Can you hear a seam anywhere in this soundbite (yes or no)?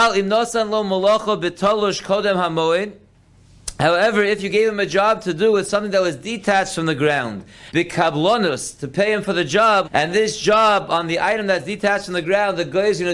yes